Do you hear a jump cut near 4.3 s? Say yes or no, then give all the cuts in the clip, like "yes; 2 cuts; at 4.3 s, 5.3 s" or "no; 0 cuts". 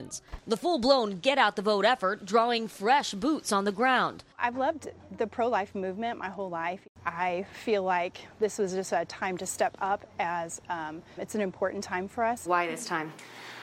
no; 2 cuts; at 11.2 s, 12.4 s